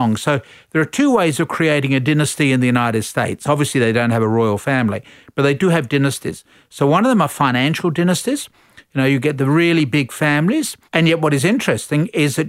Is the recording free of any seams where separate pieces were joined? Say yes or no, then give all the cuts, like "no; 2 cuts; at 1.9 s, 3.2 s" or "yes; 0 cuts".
no; 1 cut; at 10.9 s